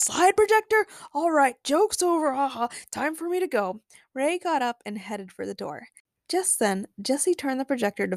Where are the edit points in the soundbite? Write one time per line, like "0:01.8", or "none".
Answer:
none